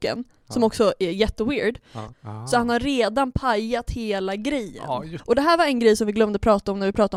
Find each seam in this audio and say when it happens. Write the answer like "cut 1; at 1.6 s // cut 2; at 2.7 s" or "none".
cut 1; at 2.1 s // cut 2; at 5.2 s